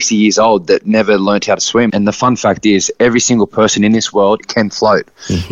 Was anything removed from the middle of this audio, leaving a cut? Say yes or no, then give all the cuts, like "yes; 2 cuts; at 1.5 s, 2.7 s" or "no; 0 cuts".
yes; 2 cuts; at 1.9 s, 4.4 s